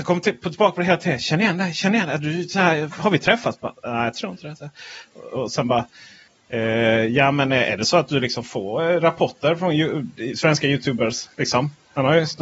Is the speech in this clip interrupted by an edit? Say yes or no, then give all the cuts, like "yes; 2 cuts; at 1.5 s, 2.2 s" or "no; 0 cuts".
no; 0 cuts